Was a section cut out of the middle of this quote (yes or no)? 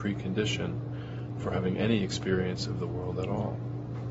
no